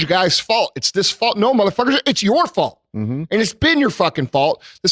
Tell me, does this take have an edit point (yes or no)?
no